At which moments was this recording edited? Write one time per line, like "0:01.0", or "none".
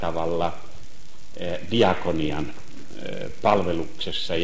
none